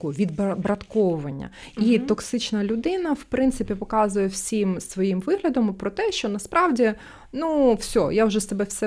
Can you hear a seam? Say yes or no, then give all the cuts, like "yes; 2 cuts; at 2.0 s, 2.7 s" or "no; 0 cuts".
no; 0 cuts